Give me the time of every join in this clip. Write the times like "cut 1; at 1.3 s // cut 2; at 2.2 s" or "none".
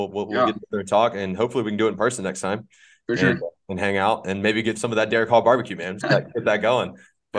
cut 1; at 4.7 s // cut 2; at 6.0 s